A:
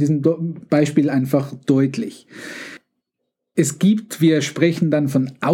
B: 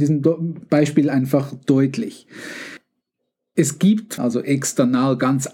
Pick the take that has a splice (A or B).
B